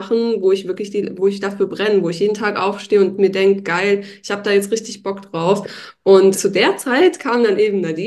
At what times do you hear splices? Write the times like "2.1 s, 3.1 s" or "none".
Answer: 6.3 s